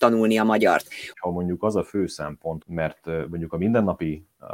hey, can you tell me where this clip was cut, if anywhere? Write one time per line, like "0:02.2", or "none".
0:01.1
0:02.6